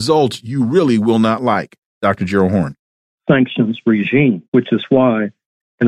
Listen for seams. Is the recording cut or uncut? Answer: cut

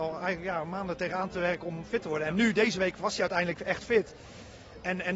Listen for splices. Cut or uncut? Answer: uncut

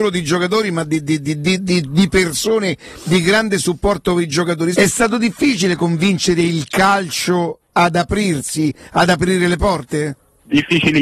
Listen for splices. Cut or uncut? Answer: cut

